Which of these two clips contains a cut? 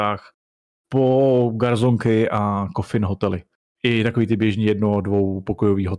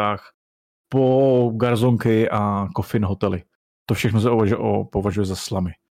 first; 1 cut; at 3.7 s

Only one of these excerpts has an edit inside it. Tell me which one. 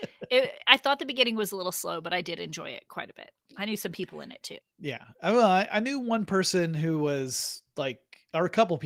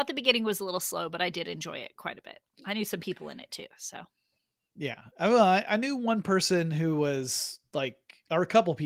first; 1 cut; at 4.6 s

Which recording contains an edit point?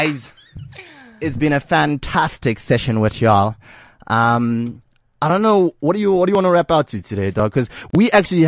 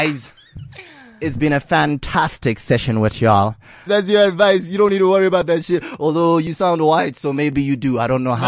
second; 1 cut; at 3.9 s

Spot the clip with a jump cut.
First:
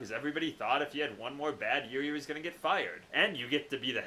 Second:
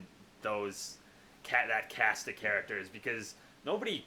first; 1 cut; at 3.1 s

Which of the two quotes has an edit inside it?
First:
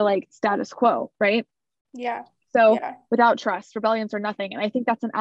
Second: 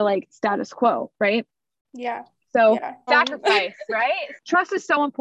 second; 1 cut; at 3.1 s

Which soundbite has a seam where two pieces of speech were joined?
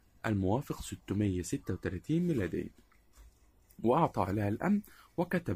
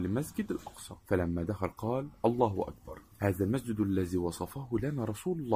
second; 2 cuts; at 1.0 s, 3.1 s

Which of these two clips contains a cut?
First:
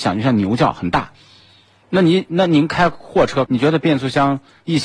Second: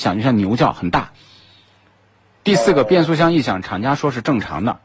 first; 2 cuts; at 1.8 s, 3.5 s

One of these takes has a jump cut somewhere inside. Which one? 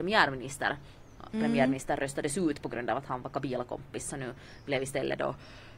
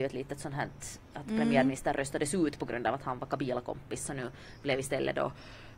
first; 1 cut; at 1.3 s

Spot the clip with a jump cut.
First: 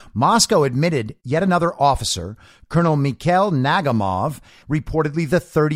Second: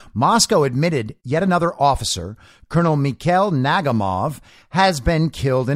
first; 1 cut; at 4.6 s

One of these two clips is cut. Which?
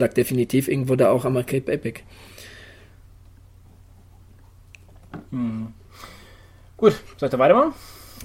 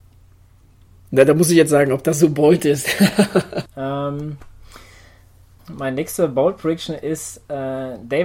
second; 2 cuts; at 3.7 s, 5.6 s

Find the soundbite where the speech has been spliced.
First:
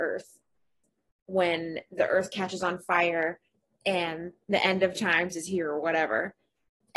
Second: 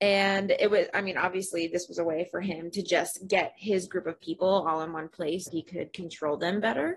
second; 1 cut; at 5.5 s

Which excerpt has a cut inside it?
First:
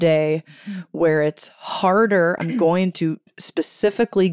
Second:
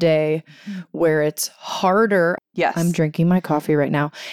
second; 1 cut; at 2.4 s

